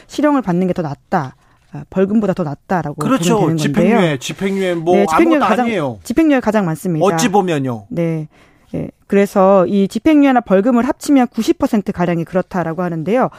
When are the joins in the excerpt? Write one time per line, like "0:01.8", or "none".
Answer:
none